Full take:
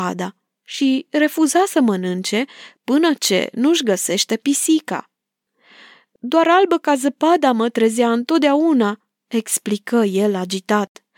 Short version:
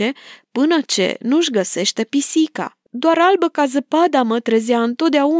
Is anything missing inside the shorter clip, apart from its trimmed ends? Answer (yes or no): yes